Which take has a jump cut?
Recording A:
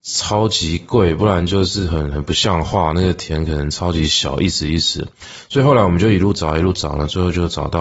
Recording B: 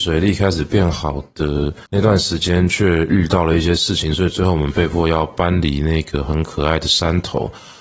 B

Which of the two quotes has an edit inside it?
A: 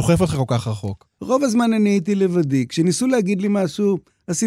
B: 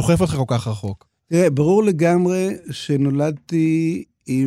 A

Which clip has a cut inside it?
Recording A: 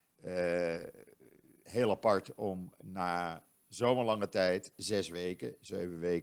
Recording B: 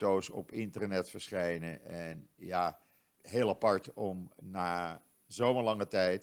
B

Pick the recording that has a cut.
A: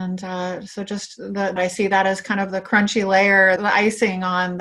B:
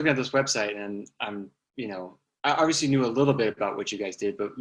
A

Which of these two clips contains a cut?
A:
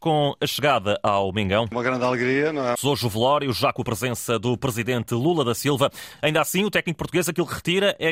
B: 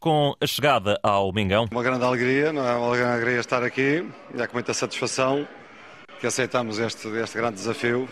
A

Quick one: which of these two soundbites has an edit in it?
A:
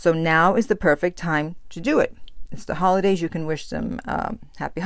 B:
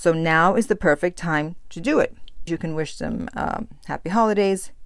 B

